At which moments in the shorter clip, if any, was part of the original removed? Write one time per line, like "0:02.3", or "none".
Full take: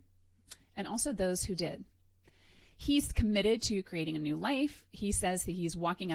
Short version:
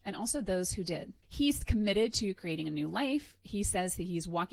0:01.2